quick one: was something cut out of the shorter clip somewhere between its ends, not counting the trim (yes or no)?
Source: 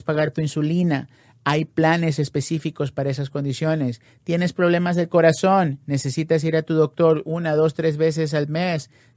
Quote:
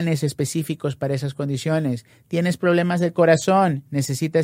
no